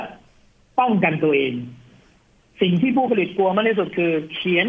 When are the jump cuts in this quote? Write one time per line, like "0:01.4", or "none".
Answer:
none